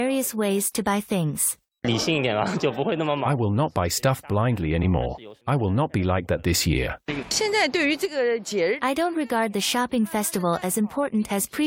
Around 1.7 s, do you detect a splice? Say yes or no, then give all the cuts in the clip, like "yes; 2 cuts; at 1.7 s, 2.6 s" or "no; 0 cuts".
no; 2 cuts; at 5.4 s, 7.2 s